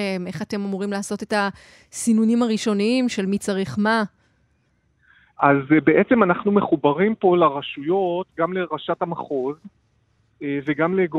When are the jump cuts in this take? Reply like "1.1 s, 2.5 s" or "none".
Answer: none